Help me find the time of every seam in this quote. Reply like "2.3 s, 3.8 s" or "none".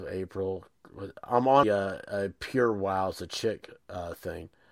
1.6 s